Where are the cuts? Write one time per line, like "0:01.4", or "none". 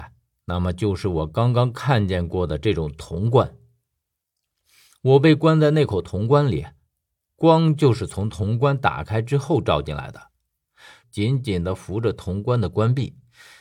0:11.0